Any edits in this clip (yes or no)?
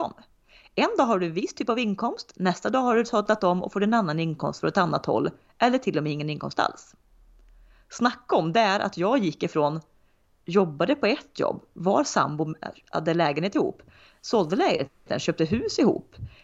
no